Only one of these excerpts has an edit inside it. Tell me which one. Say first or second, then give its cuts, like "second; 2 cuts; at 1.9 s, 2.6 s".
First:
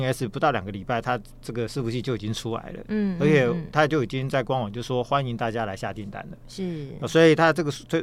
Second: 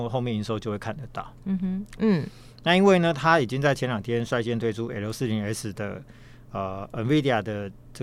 second; 1 cut; at 2.0 s